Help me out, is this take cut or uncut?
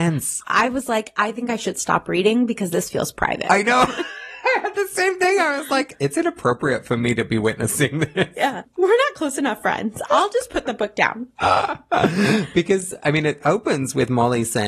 uncut